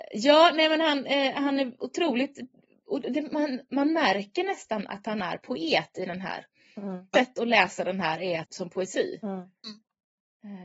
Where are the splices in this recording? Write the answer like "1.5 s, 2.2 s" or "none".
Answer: 7.1 s, 8.4 s